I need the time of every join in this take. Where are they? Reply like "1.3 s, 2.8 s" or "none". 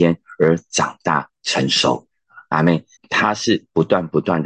3.0 s